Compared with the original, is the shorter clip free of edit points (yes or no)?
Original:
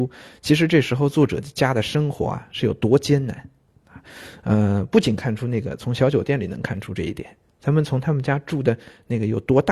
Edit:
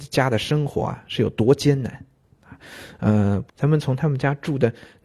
no